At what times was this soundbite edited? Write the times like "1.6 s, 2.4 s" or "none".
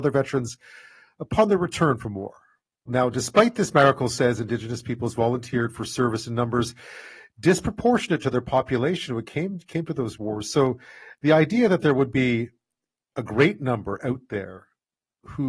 2.9 s